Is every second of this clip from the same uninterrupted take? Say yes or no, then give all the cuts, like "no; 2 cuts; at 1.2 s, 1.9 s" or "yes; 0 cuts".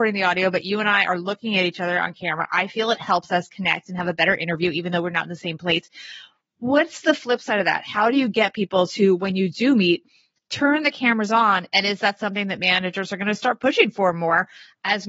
yes; 0 cuts